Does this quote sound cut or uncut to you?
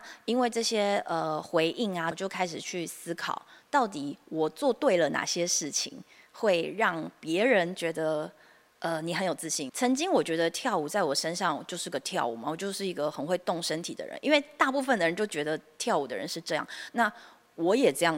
cut